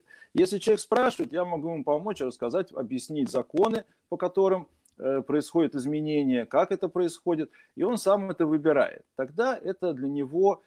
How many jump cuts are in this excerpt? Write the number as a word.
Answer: zero